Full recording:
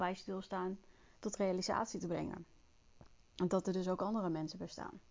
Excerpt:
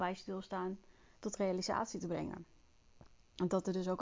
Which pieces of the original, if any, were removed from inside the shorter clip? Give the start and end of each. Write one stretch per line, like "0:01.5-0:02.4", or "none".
none